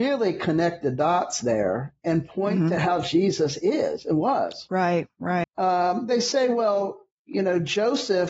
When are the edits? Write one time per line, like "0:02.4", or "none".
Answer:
0:05.4